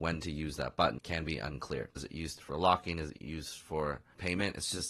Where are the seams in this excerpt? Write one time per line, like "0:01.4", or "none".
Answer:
0:02.0